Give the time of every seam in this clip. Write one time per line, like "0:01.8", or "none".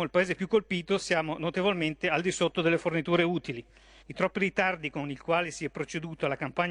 0:04.0